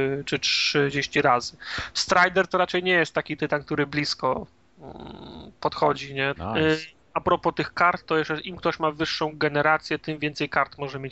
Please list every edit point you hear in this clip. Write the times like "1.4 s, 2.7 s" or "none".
6.4 s